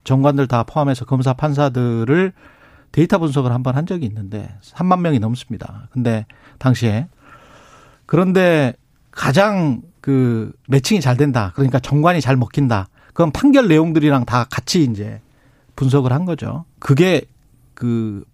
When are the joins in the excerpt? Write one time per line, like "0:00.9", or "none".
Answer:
0:16.7